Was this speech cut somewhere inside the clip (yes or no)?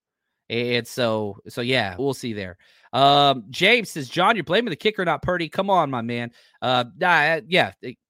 yes